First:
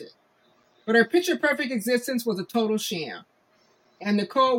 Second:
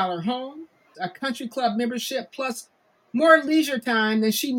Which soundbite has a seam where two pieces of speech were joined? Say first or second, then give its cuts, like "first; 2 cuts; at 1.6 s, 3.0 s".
second; 1 cut; at 0.9 s